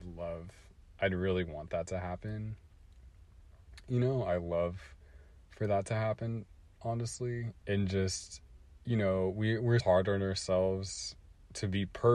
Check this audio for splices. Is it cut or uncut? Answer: cut